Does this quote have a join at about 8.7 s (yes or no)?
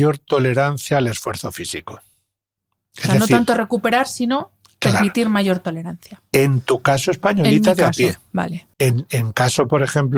yes